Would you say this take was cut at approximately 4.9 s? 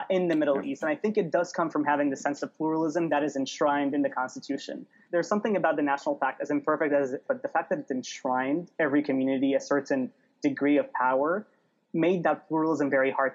no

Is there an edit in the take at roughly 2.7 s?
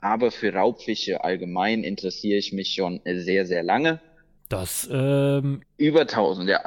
no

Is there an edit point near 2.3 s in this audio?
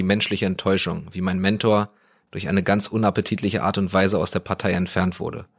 yes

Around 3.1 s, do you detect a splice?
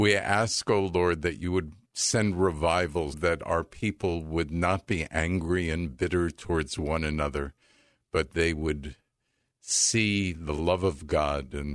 yes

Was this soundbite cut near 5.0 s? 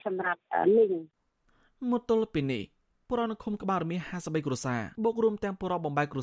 yes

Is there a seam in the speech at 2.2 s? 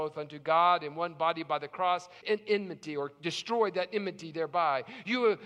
yes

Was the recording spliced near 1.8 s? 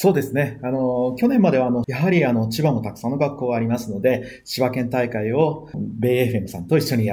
yes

